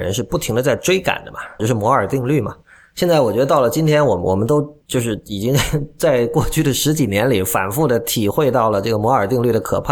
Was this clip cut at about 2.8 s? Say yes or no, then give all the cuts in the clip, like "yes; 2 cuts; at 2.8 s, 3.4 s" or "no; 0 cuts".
no; 2 cuts; at 1.6 s, 4.8 s